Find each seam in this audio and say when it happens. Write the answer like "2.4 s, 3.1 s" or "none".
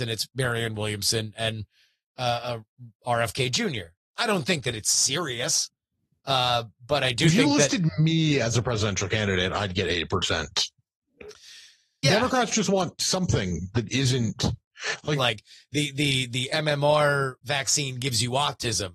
12.0 s, 15.1 s